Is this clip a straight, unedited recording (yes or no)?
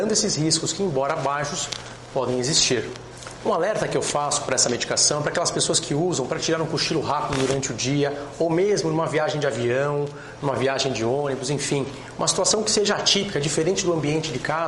yes